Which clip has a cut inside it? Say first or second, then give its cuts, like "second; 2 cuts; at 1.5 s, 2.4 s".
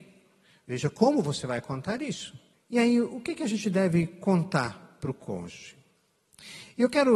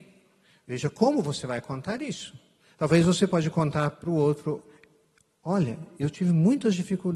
first; 1 cut; at 2.5 s